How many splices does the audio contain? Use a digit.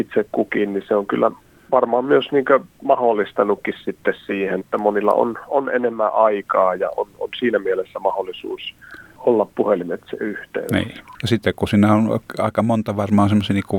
1